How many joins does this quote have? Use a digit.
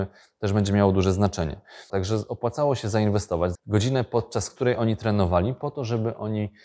2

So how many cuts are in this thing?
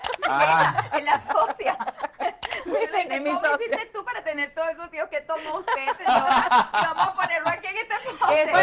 0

